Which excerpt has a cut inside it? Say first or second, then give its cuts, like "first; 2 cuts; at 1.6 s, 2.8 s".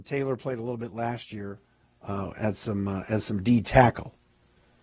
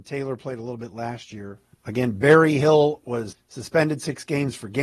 second; 2 cuts; at 1.7 s, 3.3 s